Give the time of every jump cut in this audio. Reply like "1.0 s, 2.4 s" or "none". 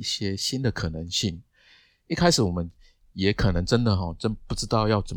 none